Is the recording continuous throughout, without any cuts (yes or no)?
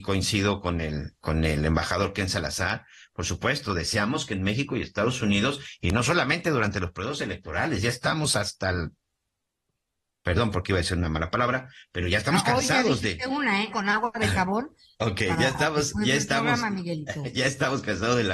no